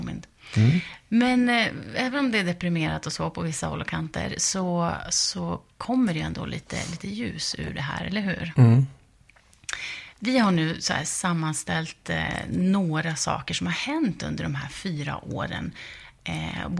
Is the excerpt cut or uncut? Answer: uncut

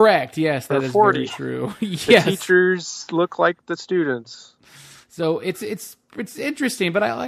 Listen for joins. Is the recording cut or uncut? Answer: uncut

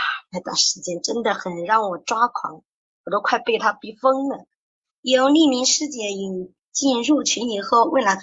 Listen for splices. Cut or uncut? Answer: cut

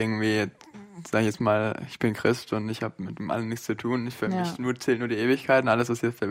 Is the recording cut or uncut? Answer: uncut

